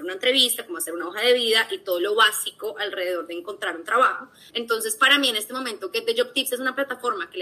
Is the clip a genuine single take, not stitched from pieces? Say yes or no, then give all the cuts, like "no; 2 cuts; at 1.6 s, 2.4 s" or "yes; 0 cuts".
no; 1 cut; at 4.5 s